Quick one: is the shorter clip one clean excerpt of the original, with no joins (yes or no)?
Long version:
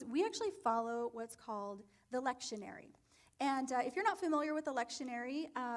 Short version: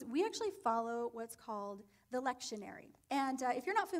no